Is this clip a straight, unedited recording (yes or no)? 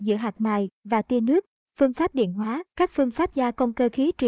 no